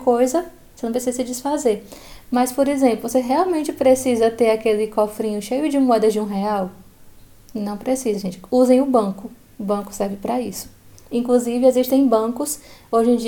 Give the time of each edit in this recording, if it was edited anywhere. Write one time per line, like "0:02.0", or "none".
none